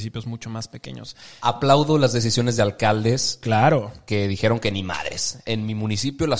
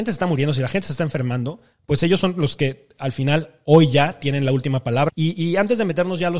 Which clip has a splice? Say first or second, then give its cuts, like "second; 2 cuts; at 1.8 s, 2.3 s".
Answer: second; 1 cut; at 5.1 s